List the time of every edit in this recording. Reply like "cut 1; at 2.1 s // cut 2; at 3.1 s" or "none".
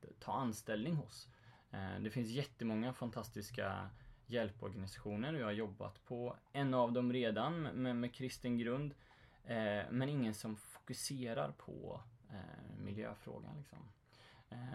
none